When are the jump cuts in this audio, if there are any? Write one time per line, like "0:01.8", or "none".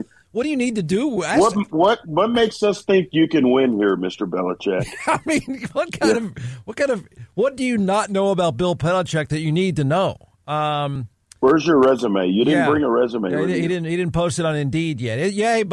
none